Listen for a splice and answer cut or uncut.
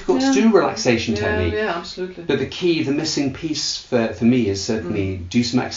uncut